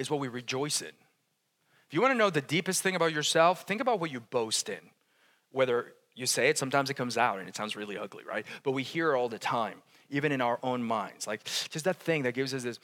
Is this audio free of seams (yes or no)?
yes